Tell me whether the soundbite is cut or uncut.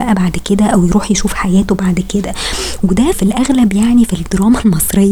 cut